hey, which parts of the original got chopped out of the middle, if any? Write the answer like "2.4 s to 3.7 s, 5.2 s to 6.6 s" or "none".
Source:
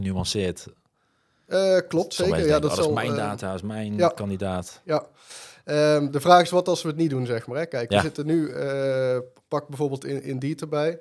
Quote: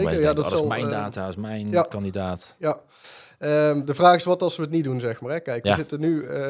none

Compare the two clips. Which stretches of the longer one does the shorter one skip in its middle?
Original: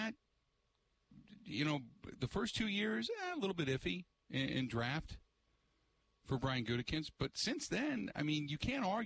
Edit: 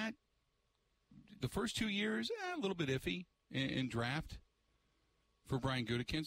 1.4 s to 2.2 s

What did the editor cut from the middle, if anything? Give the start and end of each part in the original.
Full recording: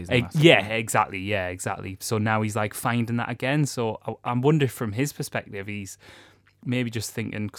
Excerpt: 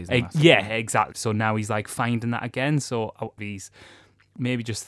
1.1 s to 2.0 s, 4.2 s to 5.6 s

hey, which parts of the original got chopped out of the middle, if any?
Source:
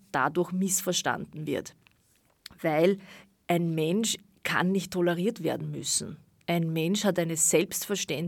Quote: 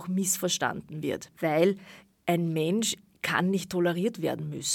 1.8 s to 2.6 s

